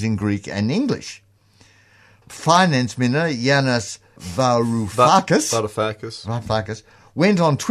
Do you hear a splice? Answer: yes; 1 cut; at 4.2 s

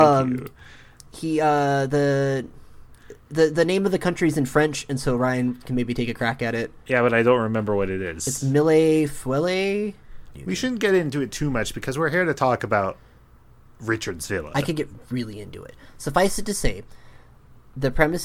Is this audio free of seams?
no; 1 cut; at 10.3 s

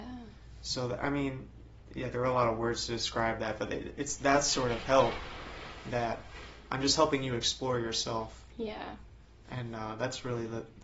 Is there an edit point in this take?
no; 0 cuts

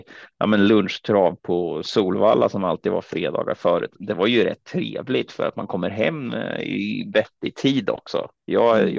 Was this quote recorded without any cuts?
yes; 0 cuts

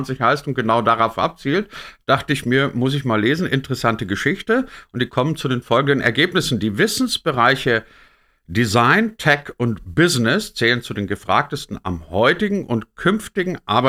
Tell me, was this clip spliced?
no; 0 cuts

